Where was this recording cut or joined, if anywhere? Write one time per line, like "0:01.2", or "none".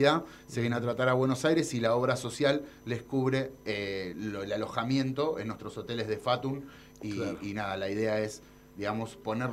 none